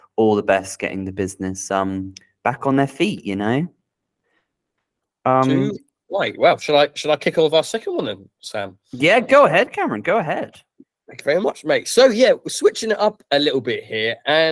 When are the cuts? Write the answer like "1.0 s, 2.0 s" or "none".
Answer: none

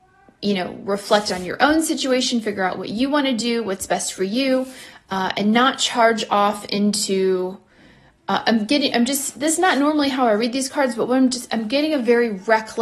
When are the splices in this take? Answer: none

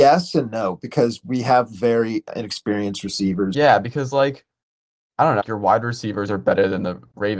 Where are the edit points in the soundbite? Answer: 3.5 s, 5.4 s

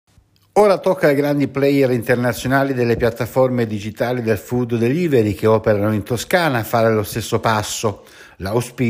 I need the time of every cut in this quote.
none

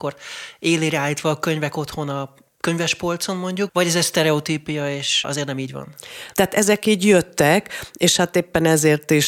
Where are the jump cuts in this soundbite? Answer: 3.7 s, 6.3 s

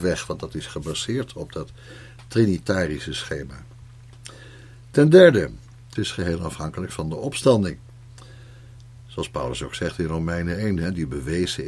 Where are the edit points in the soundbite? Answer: 6.0 s

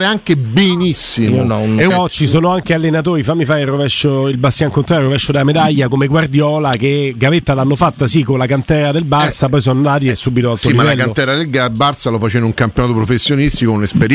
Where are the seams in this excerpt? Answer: 1.9 s

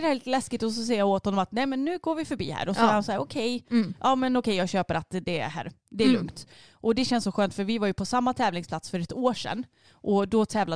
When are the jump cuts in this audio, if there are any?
none

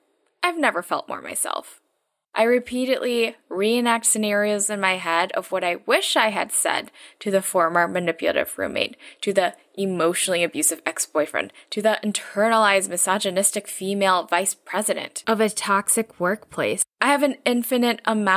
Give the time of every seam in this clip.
2.2 s

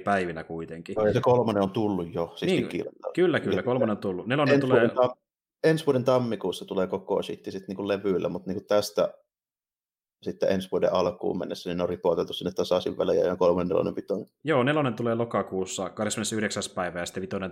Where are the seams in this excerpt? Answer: none

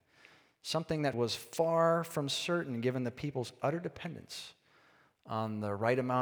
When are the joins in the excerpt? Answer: 1.1 s

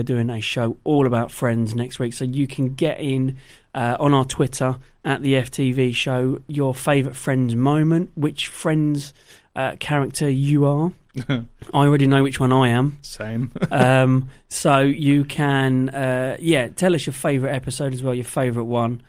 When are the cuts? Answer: none

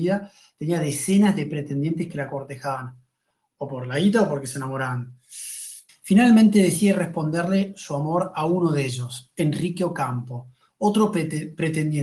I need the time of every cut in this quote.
5.9 s

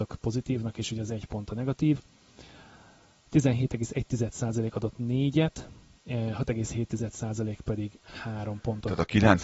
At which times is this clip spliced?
none

